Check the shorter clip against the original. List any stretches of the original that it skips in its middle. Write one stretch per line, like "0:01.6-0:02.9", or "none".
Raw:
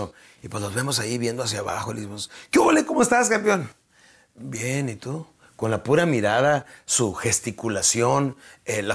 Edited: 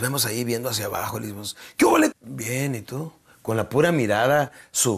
0:02.9-0:04.3